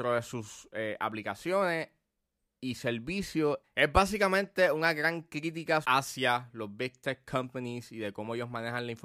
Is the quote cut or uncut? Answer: cut